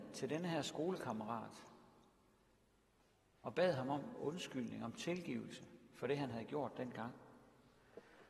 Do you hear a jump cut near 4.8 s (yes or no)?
no